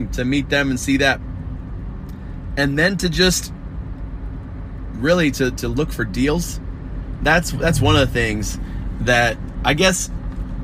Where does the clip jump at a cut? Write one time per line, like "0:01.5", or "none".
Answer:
none